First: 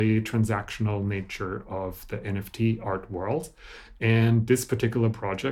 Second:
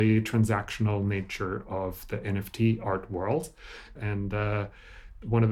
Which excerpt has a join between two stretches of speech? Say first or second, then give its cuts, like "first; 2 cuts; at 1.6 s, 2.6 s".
second; 1 cut; at 4.0 s